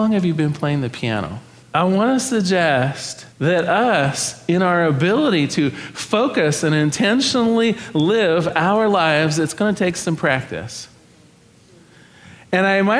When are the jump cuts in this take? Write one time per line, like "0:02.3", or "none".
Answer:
0:01.6
0:03.3